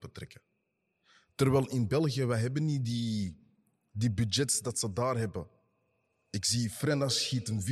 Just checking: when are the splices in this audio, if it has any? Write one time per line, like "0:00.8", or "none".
none